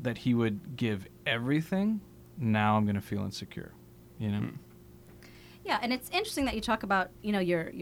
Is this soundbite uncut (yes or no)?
yes